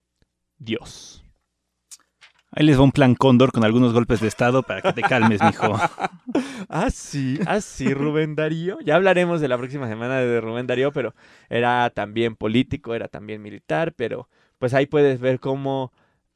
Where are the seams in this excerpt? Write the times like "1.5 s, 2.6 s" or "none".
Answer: none